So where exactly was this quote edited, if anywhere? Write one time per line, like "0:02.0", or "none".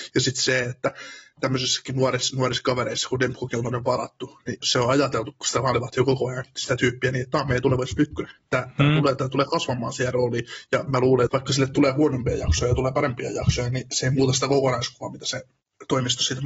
0:04.6
0:11.3